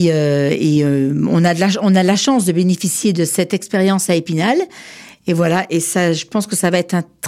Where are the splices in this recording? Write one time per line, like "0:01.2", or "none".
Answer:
none